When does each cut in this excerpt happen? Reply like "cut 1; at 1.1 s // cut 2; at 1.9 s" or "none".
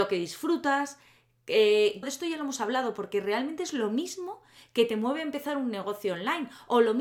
cut 1; at 2.0 s